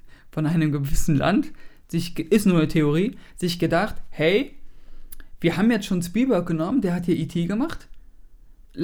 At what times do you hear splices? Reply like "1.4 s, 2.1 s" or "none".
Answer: none